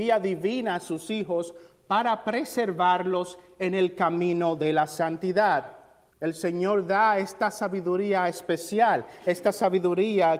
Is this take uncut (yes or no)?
no